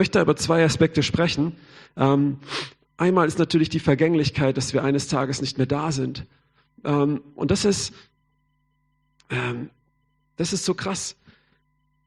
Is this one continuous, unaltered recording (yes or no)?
yes